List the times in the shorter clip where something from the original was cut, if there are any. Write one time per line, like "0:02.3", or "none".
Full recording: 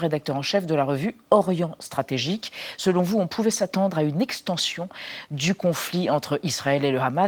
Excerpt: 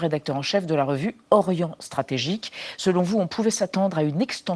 none